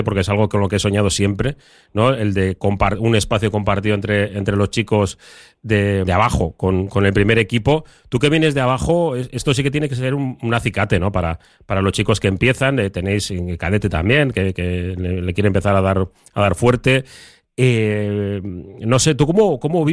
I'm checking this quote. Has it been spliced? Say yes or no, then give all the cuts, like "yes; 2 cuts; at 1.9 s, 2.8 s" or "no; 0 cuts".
yes; 1 cut; at 6.0 s